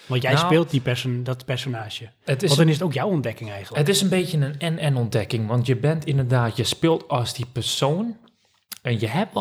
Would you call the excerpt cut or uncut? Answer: uncut